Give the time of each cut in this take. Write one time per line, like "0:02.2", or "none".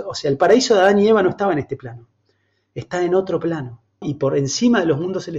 0:04.0